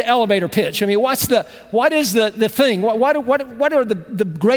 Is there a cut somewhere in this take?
no; 0 cuts

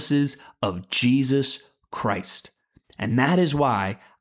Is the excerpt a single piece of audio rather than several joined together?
yes; 0 cuts

